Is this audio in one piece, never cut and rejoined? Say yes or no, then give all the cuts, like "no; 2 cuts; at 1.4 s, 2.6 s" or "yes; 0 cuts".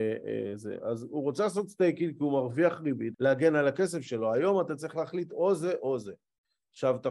no; 1 cut; at 3.1 s